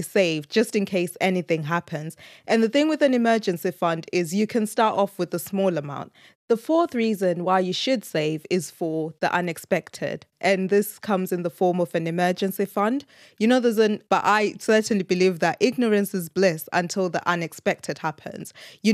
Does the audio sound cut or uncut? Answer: cut